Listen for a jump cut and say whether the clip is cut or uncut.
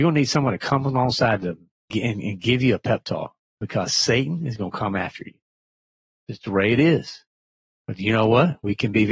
cut